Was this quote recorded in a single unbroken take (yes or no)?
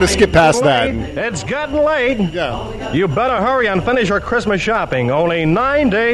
yes